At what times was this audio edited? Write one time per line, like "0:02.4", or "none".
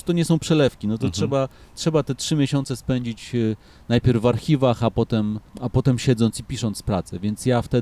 0:05.5